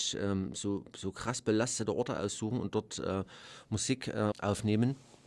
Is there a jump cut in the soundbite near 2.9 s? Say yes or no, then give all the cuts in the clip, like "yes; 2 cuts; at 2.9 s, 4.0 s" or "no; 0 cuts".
no; 1 cut; at 4.3 s